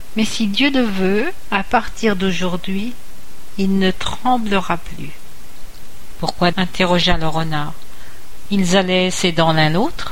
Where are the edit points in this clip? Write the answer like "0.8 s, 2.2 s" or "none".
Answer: 6.5 s, 8.5 s